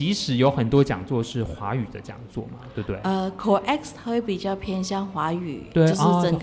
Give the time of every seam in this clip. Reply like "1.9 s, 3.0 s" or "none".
none